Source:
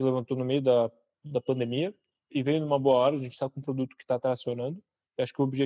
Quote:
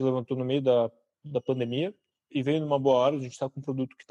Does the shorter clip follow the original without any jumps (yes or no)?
yes